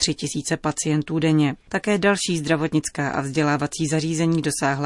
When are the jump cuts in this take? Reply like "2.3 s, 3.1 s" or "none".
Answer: 1.6 s